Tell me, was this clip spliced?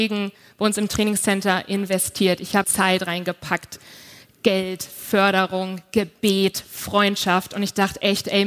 yes; 1 cut; at 2.6 s

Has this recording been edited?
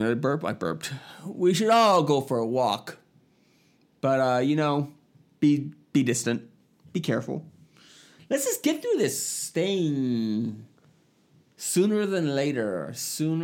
no; 0 cuts

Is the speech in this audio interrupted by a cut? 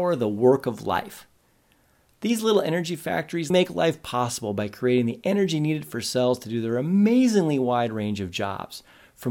yes; 1 cut; at 3.5 s

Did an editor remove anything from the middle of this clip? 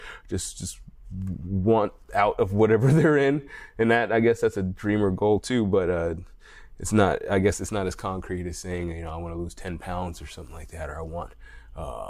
no; 0 cuts

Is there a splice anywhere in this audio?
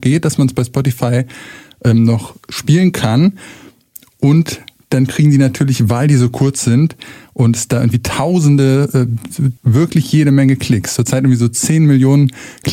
yes; 1 cut; at 9.6 s

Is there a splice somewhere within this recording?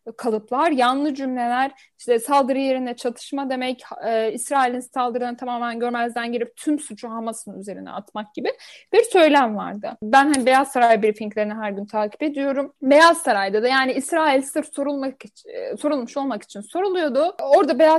no; 0 cuts

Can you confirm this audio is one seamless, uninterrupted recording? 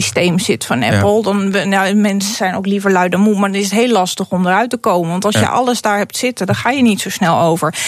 yes; 0 cuts

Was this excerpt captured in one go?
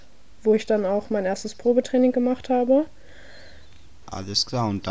no; 1 cut; at 4.0 s

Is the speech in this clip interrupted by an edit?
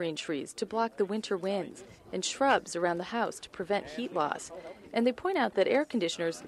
no; 0 cuts

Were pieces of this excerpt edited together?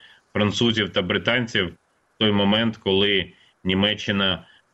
no; 0 cuts

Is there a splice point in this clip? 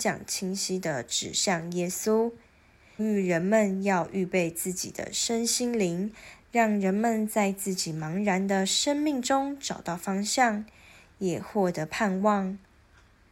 yes; 2 cuts; at 3.0 s, 6.4 s

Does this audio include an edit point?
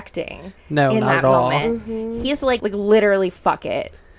yes; 1 cut; at 2.6 s

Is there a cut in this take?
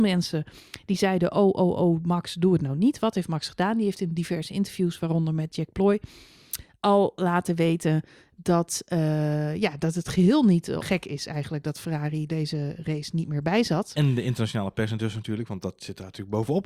yes; 3 cuts; at 10.8 s, 12.3 s, 14.0 s

